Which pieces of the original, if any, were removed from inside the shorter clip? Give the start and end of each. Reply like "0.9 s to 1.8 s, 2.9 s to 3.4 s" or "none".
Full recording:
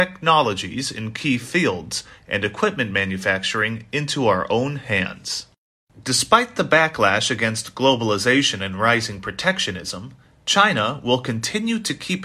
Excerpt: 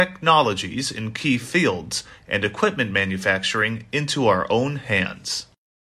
none